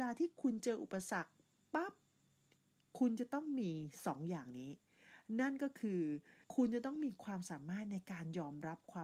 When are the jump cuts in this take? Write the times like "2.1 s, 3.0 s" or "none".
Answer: 6.4 s